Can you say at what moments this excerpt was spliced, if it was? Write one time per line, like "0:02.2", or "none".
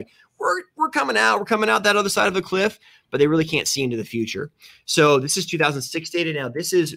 none